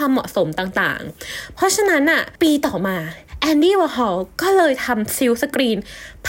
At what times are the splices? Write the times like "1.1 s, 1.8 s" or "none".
2.4 s